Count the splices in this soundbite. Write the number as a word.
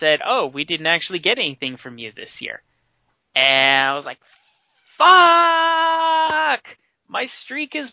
zero